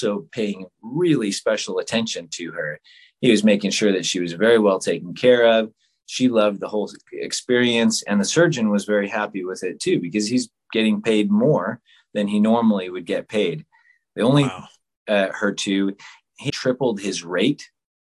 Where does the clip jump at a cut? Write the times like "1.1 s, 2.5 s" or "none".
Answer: 15.0 s, 16.5 s